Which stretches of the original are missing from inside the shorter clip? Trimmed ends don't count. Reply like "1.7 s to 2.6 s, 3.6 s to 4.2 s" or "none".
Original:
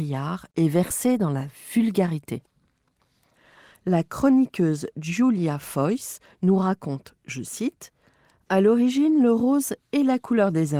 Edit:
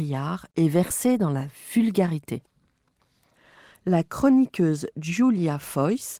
none